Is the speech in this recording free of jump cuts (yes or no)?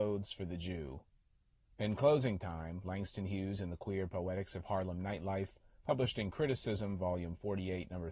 yes